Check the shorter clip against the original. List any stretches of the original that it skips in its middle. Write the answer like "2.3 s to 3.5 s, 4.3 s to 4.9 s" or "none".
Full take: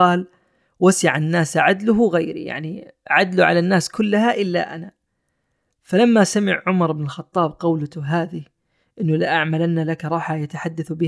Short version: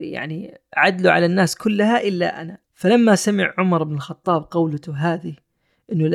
5.0 s to 5.7 s